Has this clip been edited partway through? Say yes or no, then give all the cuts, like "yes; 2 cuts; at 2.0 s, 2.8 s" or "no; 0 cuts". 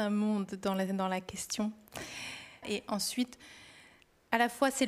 yes; 1 cut; at 2.6 s